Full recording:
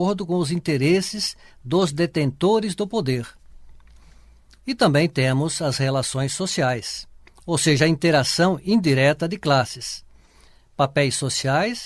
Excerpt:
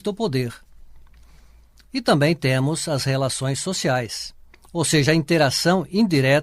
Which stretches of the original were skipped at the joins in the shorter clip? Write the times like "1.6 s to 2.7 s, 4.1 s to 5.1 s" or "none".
none